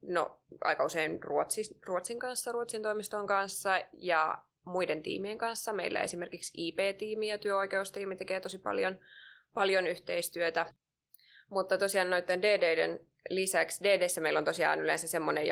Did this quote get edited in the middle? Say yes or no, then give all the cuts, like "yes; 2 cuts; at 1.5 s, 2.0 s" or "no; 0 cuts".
no; 0 cuts